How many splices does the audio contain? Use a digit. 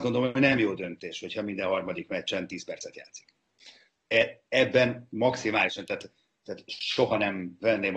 1